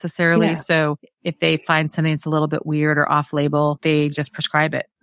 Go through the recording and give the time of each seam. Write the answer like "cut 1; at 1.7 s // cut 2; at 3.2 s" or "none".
none